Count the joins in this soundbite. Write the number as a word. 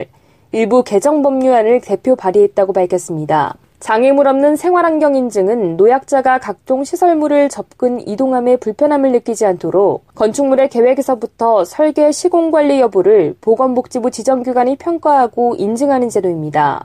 two